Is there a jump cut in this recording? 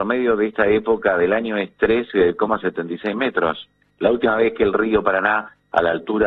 no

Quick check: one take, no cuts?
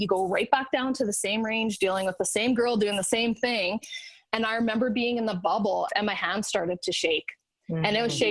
no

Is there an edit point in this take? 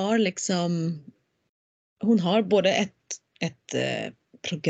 no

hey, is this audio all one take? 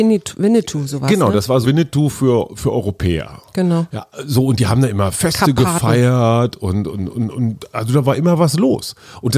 no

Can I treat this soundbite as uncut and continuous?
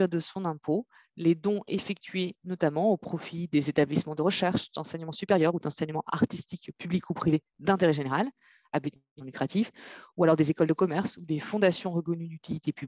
yes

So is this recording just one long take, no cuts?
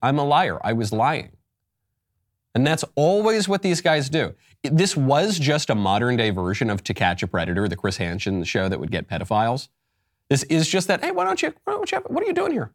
yes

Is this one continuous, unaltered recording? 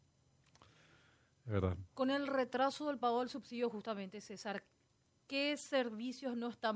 no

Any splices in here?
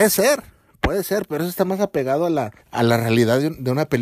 yes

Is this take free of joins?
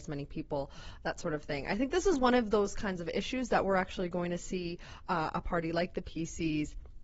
yes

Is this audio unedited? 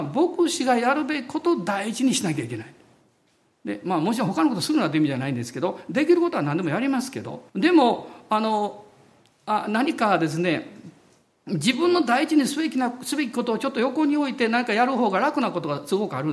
no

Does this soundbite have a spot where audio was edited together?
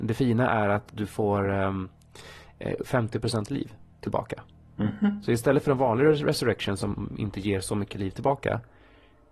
yes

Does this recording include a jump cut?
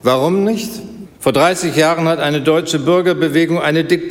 yes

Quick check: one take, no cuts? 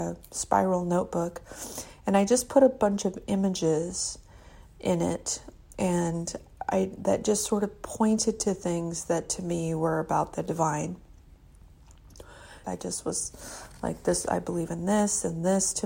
no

